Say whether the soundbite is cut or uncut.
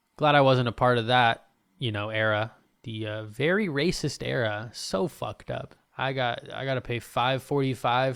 cut